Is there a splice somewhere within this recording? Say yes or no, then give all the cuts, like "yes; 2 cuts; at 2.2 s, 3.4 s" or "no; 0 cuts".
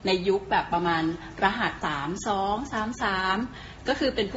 yes; 1 cut; at 1.8 s